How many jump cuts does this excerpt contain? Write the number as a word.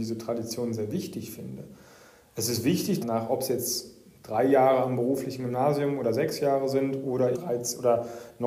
two